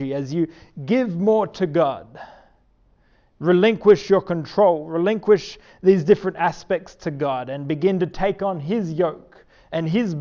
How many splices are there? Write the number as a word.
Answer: zero